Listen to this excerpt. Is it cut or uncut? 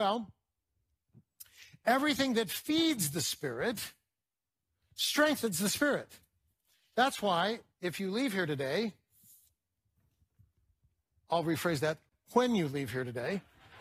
uncut